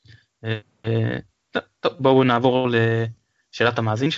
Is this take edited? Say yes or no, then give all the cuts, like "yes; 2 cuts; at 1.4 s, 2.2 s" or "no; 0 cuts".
no; 0 cuts